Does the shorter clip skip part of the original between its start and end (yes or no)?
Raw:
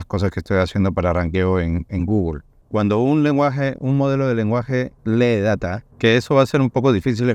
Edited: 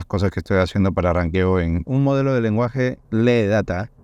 yes